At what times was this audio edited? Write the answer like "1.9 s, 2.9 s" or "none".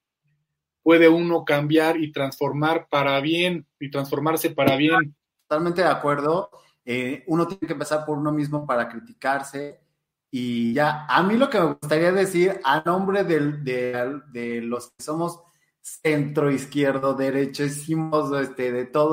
5.3 s